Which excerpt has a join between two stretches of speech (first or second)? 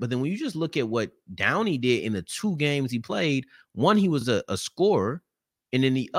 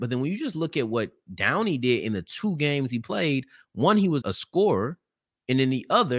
second